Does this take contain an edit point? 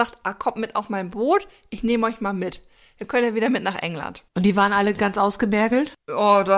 no; 0 cuts

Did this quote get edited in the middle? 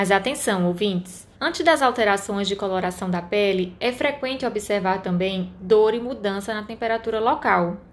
yes; 1 cut; at 1.3 s

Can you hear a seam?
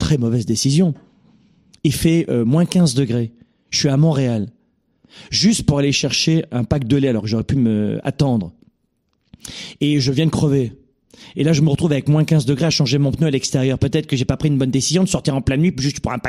no; 0 cuts

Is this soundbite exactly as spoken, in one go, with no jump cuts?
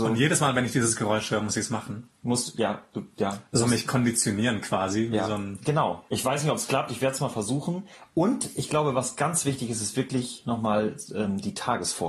no; 2 cuts; at 2.2 s, 6.1 s

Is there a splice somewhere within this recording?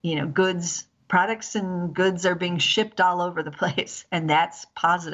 no; 0 cuts

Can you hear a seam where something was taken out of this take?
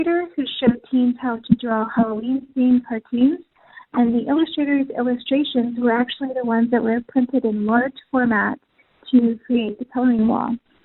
no; 0 cuts

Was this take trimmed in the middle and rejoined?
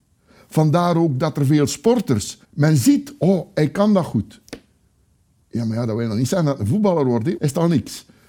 yes; 2 cuts; at 2.4 s, 7.4 s

